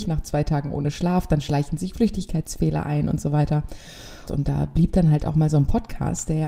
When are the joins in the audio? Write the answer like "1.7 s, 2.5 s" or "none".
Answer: 4.3 s